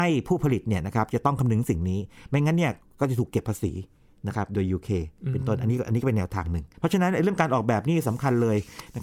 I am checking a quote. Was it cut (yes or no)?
yes